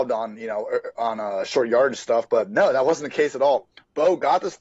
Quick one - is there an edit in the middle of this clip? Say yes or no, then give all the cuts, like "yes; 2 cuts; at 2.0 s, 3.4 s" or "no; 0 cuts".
no; 0 cuts